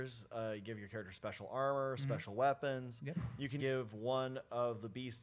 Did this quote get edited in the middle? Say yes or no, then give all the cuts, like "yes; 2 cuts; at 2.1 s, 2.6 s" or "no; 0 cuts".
yes; 1 cut; at 3.6 s